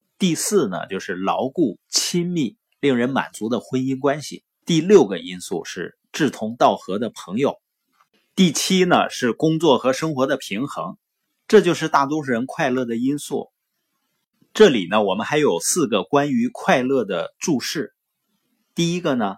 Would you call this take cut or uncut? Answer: cut